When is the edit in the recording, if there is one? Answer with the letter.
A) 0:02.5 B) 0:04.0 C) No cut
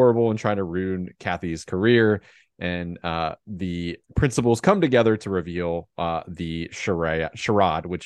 B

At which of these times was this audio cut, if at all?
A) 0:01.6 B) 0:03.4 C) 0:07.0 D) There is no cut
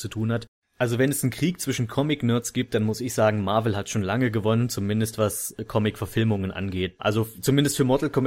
C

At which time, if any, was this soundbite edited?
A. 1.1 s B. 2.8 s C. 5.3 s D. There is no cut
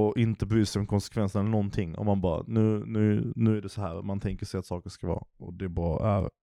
D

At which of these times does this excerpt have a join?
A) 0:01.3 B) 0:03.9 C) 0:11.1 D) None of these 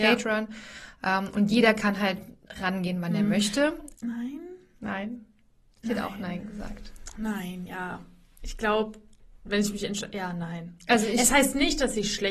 B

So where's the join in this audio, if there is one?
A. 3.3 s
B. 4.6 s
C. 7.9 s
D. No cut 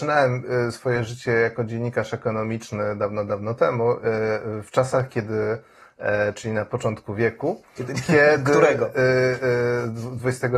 D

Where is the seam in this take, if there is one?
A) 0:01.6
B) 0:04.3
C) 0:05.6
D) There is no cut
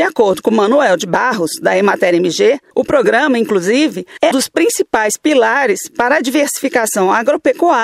B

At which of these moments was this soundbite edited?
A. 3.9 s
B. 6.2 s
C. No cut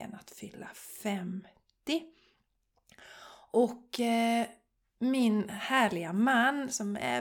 C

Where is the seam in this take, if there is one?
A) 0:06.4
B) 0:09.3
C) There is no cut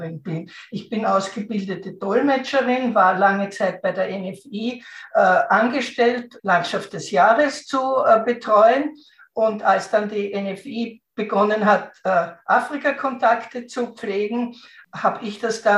A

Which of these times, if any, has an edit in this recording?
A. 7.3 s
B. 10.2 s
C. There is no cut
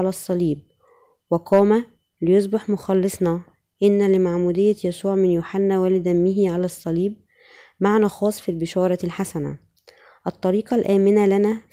C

